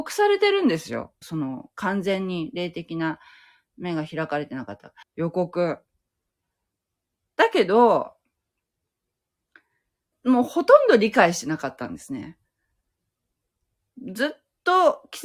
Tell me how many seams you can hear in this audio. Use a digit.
3